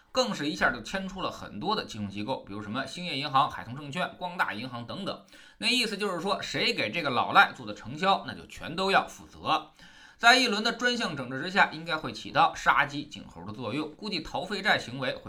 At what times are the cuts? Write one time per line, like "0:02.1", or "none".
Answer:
none